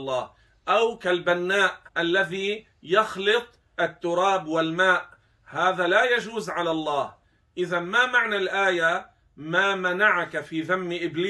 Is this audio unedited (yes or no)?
no